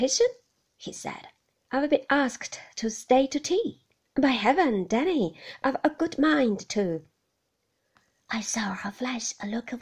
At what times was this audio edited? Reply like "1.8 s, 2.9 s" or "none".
none